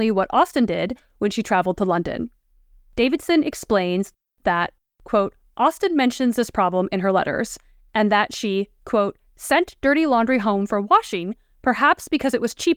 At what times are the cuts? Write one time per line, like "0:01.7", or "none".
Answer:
none

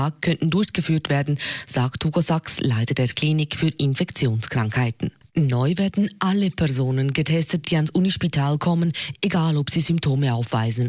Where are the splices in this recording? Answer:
none

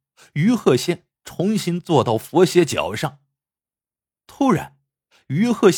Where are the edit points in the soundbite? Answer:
0:04.2

